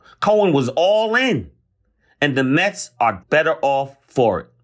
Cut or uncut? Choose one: cut